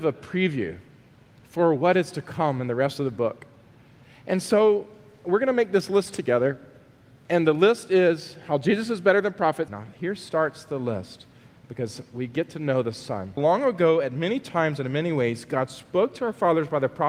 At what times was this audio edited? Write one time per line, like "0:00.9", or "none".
0:09.7
0:13.4